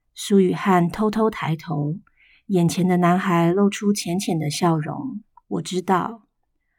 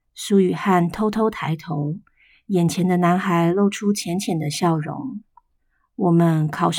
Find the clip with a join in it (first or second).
first